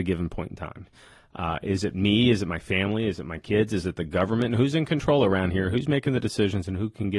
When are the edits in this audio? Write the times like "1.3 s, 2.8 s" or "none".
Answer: none